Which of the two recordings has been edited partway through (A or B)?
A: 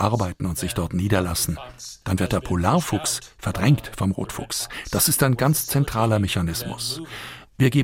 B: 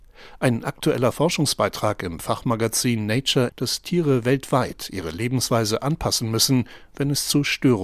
B